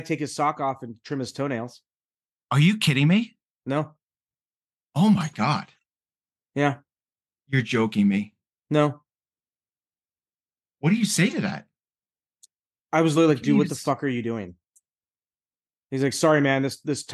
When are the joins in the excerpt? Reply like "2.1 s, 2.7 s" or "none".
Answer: none